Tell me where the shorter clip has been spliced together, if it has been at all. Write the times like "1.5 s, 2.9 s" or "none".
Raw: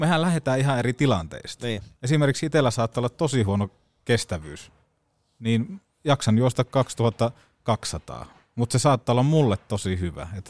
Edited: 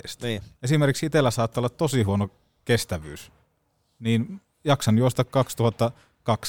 none